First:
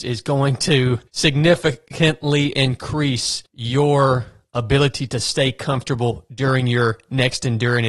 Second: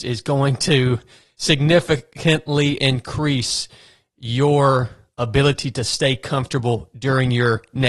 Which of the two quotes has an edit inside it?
first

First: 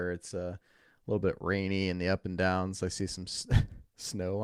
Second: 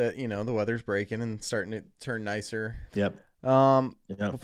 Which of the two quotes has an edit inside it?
second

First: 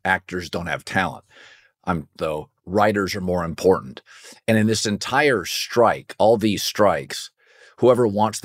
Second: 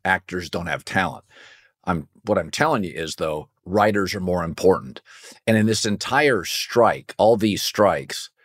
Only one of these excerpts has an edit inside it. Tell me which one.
first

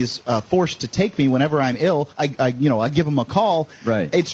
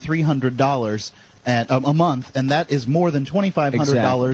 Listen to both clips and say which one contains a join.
first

